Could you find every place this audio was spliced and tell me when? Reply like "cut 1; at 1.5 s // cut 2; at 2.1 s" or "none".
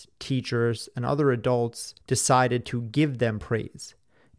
cut 1; at 2.0 s